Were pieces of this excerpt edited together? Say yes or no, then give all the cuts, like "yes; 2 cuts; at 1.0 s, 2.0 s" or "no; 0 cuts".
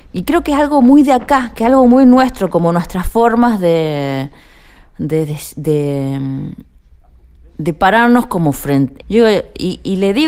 yes; 1 cut; at 9.0 s